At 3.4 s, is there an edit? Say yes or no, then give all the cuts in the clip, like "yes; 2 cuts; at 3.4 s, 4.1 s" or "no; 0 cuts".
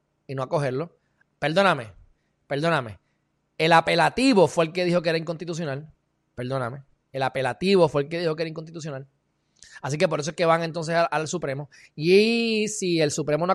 no; 1 cut; at 1.2 s